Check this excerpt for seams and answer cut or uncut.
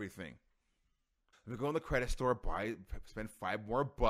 cut